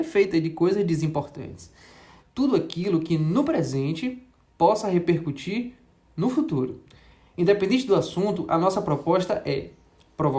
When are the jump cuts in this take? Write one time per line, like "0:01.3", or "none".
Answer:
0:02.2